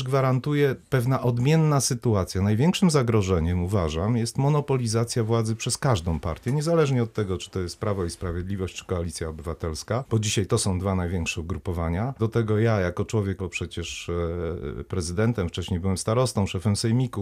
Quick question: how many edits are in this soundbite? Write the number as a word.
two